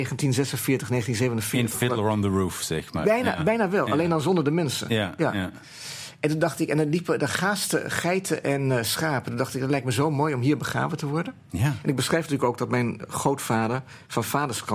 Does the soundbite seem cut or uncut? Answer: uncut